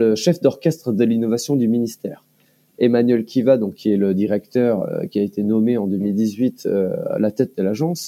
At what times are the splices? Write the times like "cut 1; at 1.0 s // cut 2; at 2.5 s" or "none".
none